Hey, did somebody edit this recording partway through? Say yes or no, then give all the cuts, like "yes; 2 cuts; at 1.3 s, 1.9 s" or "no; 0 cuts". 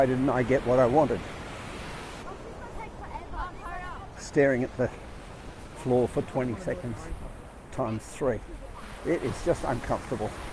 yes; 2 cuts; at 2.2 s, 4.2 s